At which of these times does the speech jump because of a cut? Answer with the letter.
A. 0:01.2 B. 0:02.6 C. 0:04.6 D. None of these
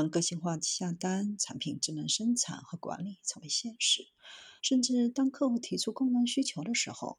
C